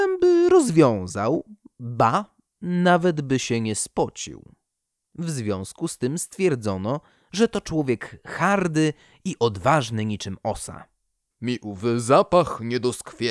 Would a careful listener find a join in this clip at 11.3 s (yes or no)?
yes